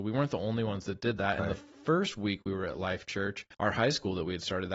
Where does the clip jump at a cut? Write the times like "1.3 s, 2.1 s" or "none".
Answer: 1.4 s, 3.5 s